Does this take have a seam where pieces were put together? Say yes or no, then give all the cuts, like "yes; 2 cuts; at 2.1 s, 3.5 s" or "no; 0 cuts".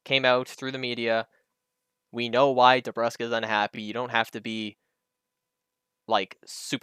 no; 0 cuts